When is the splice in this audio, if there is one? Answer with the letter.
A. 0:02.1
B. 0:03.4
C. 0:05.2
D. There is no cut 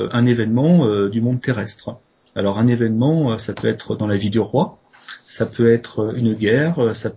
D